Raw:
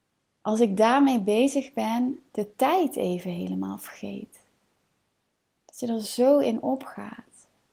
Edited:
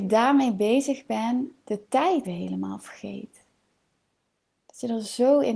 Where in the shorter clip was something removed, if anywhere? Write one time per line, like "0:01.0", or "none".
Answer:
0:02.2